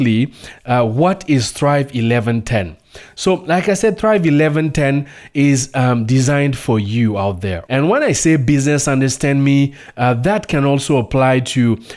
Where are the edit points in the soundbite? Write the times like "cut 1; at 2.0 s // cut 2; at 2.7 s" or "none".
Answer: cut 1; at 7.6 s